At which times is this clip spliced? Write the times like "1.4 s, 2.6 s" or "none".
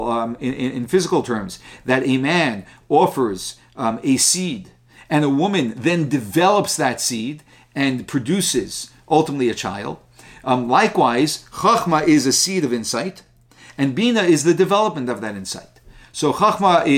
none